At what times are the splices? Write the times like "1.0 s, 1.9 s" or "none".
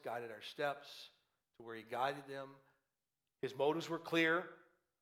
3.3 s